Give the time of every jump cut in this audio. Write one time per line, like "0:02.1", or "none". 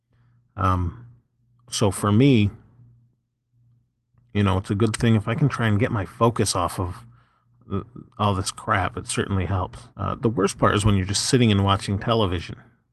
0:09.9